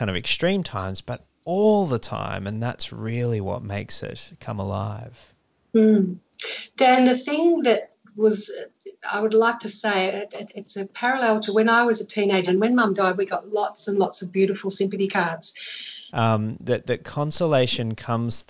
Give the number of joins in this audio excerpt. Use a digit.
2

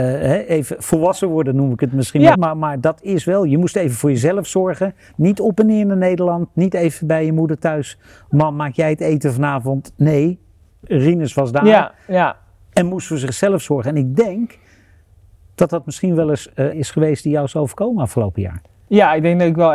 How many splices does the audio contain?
2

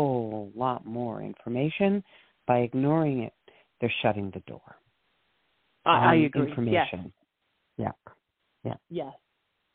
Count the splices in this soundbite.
0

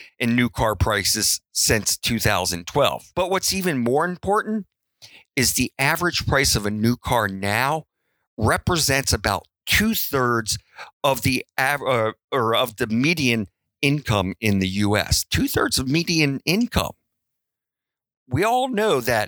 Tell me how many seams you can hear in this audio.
1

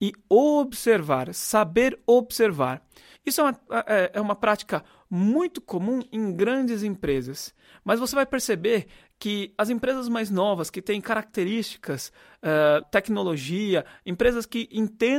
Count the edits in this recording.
2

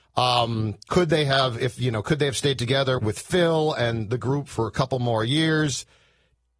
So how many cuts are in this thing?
1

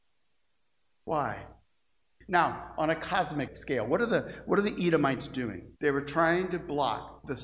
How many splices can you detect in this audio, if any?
3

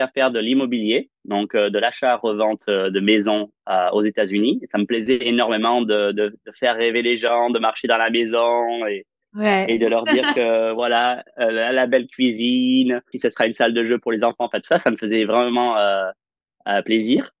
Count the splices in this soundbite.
1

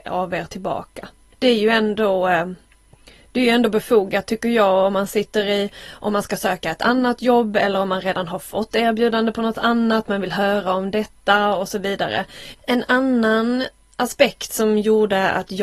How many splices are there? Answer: 2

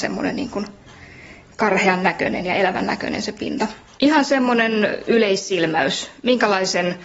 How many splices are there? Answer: 1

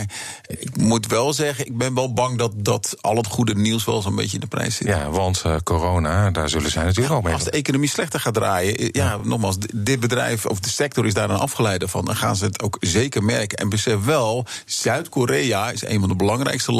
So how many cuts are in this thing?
0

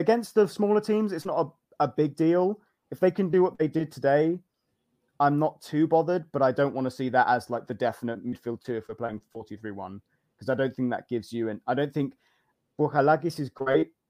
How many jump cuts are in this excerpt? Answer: 0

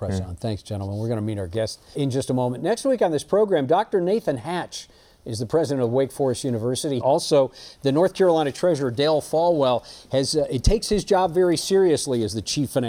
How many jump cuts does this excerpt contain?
2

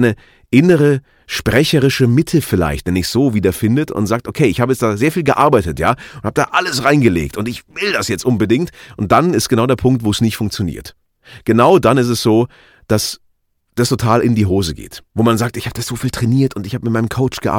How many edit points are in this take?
1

